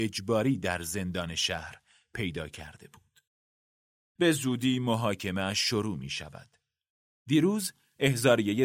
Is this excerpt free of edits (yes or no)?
yes